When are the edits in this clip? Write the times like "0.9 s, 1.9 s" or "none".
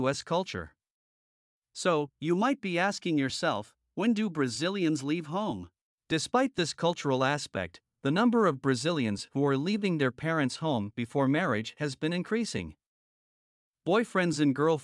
1.5 s, 5.9 s